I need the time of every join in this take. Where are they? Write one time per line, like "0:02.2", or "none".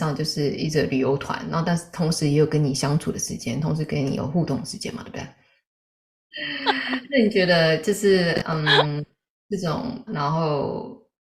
0:06.3
0:10.1